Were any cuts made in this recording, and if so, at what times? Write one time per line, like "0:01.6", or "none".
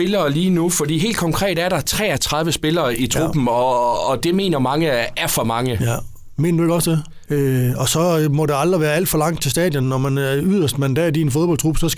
0:07.3